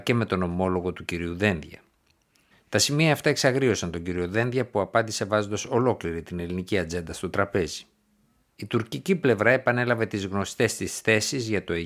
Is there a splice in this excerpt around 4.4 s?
no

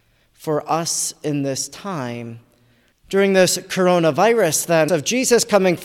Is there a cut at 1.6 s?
no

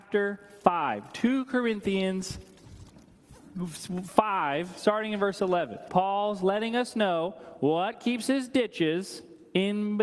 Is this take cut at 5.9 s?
yes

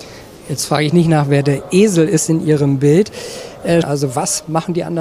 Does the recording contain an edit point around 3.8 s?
yes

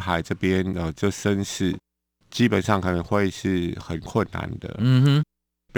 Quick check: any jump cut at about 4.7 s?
no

